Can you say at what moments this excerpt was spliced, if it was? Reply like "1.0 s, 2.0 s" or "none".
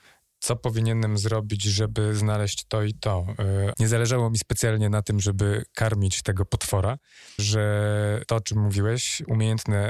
3.7 s, 7.4 s